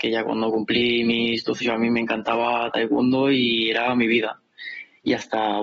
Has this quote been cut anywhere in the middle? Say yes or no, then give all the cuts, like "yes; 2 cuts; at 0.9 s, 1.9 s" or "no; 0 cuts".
yes; 1 cut; at 1.6 s